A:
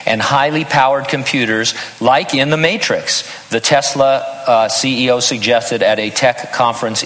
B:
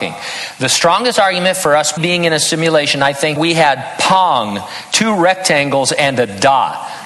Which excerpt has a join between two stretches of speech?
B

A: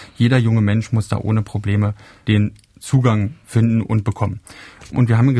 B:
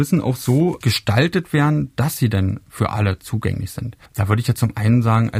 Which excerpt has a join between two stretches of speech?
B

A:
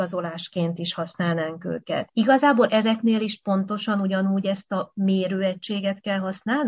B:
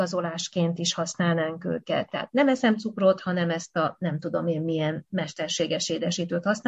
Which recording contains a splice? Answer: A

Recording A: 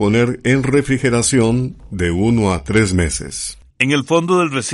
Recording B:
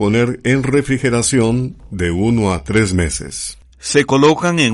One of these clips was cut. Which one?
A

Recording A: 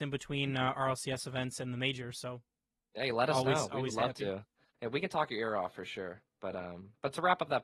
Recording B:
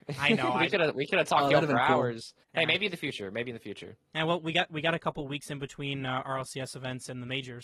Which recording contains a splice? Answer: B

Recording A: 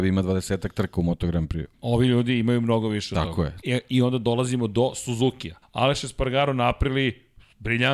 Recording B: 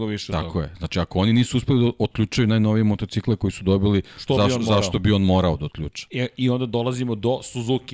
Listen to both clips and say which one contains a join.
A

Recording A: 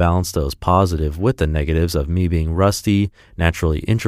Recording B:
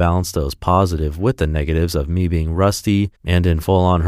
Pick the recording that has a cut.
B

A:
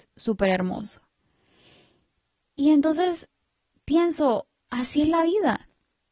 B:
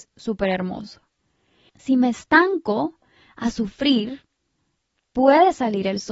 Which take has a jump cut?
B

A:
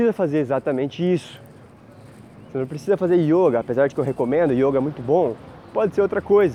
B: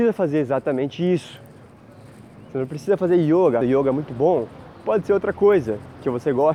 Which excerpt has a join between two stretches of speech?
B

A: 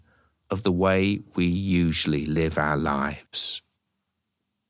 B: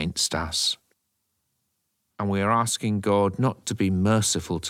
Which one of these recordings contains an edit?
B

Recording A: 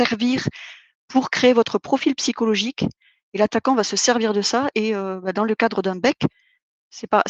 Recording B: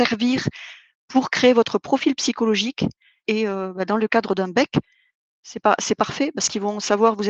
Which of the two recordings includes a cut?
B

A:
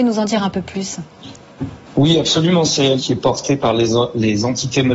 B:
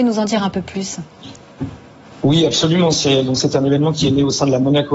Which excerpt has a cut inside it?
A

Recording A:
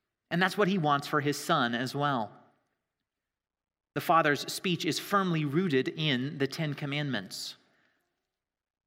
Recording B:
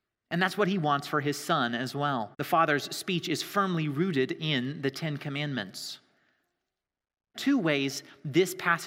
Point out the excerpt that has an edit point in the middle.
B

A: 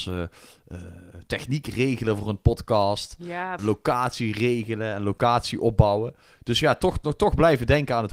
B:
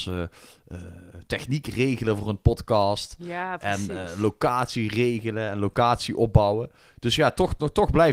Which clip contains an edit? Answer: A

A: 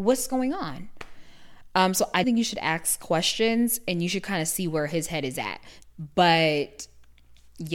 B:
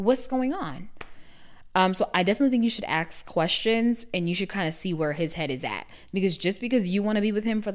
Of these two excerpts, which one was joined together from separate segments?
A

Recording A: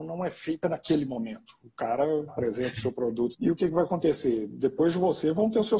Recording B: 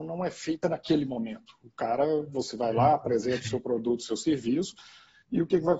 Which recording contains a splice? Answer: A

